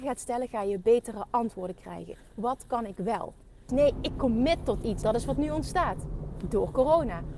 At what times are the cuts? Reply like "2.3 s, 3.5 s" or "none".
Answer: 3.7 s, 5.0 s

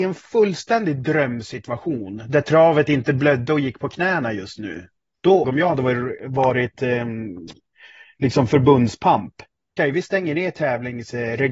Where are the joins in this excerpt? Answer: 5.4 s, 9.8 s

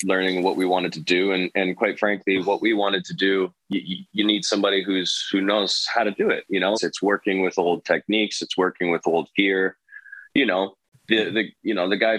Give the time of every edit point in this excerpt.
6.7 s

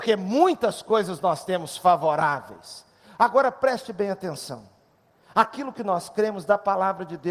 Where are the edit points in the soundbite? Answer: none

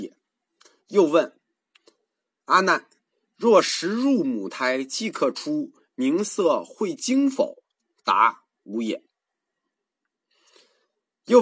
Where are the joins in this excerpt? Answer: none

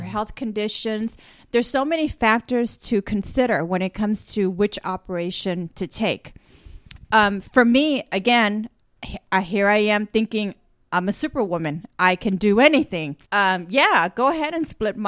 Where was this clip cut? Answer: 13.2 s

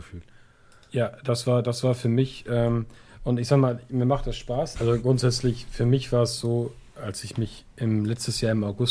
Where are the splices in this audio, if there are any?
4.8 s

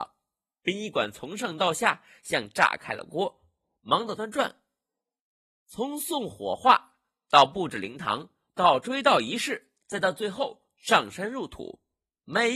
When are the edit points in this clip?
4.2 s

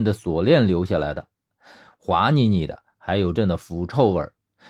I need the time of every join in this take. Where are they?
2.0 s, 3.3 s

